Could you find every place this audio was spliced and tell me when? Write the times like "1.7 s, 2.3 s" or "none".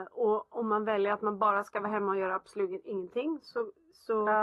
none